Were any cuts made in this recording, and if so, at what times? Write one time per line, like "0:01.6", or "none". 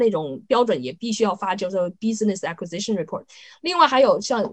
none